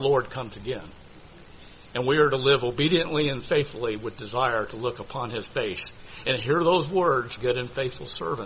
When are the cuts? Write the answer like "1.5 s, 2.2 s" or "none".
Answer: 7.4 s